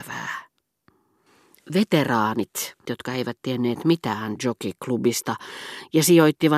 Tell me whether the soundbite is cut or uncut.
cut